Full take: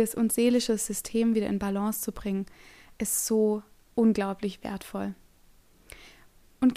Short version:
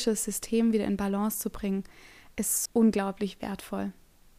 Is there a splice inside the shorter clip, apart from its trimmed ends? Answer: yes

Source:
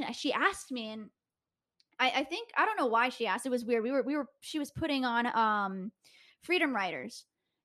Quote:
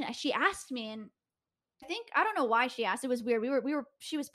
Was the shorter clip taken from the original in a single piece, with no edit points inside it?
no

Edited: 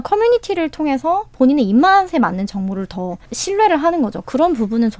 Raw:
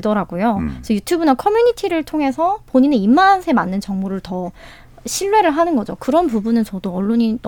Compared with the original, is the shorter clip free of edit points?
no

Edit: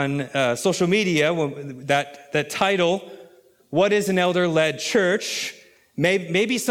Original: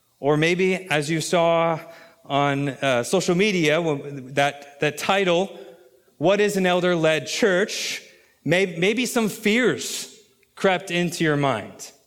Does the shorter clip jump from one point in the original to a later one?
no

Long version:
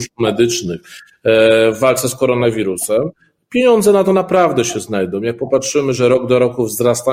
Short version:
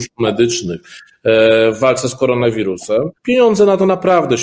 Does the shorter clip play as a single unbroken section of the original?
no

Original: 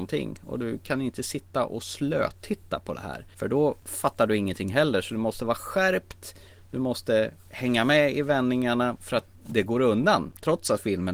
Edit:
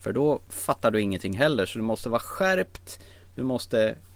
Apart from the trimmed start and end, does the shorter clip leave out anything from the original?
no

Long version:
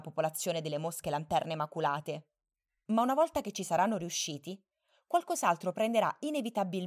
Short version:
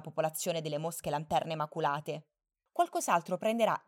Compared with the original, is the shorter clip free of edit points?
no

